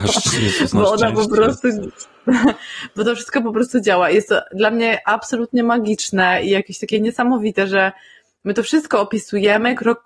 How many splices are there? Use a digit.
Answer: 0